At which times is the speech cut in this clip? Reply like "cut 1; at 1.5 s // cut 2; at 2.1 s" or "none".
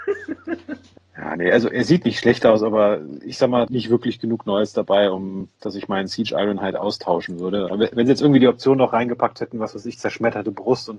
cut 1; at 3.7 s // cut 2; at 7.7 s